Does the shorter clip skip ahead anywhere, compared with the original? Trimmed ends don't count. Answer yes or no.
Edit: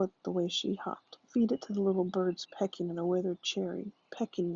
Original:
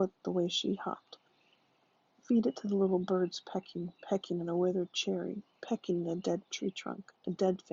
yes